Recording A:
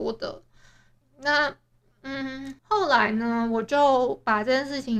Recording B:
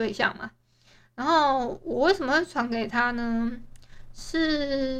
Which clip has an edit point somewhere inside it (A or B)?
A